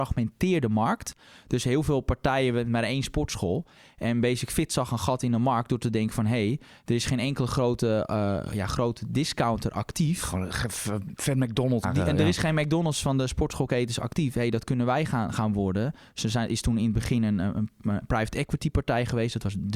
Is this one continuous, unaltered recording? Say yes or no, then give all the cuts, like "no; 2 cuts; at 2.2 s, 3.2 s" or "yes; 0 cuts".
no; 1 cut; at 11.8 s